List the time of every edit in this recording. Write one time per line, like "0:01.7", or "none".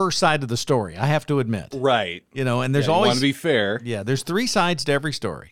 none